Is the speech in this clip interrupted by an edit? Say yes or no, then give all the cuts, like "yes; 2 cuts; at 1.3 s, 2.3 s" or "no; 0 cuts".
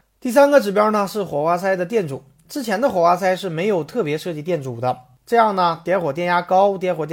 no; 0 cuts